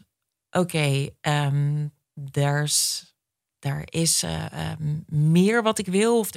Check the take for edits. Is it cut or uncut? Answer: uncut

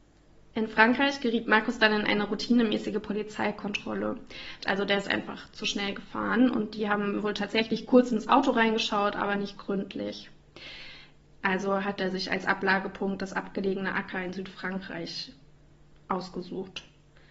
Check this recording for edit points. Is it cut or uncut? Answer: cut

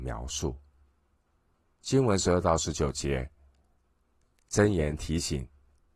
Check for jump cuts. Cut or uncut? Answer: cut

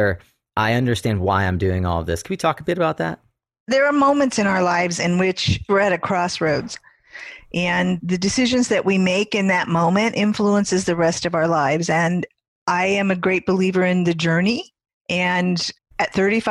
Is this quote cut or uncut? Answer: uncut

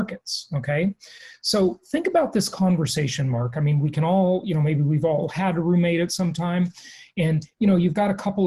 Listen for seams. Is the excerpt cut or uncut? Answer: uncut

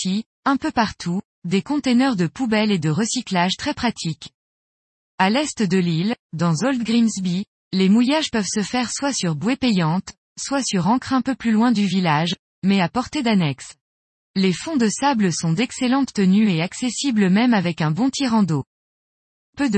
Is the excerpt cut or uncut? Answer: uncut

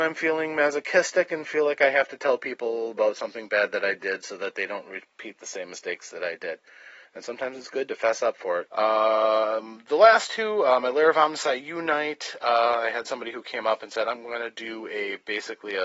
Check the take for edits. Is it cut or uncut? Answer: cut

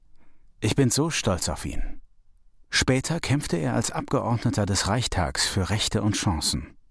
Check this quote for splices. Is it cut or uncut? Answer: uncut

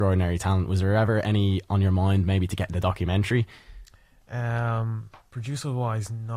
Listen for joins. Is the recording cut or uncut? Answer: uncut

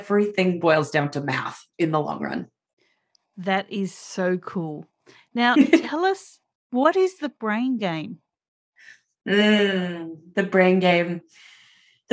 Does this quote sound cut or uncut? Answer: uncut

